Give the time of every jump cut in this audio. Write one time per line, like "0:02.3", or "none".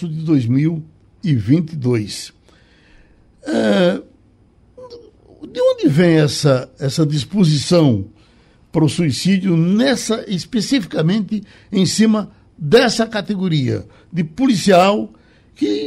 0:06.8